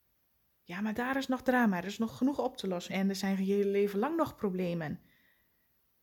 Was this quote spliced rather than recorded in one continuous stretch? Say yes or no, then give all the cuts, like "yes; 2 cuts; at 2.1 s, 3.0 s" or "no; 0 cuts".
yes; 1 cut; at 2.9 s